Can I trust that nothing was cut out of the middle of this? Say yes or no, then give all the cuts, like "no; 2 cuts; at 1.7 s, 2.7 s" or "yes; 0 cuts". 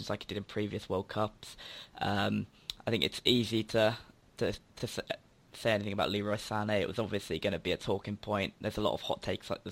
yes; 0 cuts